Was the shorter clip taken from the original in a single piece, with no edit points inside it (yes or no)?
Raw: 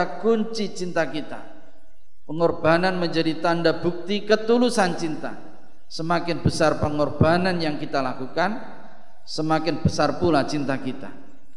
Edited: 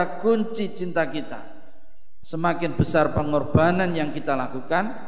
no